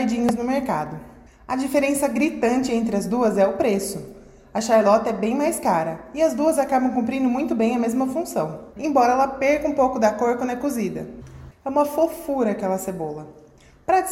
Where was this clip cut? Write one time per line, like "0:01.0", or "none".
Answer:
0:08.8
0:11.5